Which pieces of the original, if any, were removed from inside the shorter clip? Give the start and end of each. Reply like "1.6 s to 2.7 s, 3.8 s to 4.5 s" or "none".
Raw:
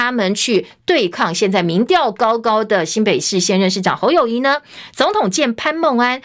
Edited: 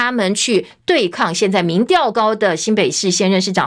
2.1 s to 2.4 s